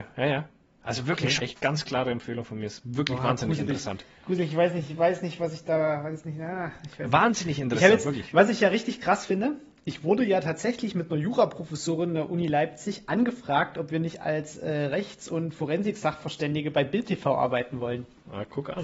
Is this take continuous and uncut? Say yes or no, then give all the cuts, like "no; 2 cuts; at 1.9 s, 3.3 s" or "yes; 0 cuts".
no; 1 cut; at 1.4 s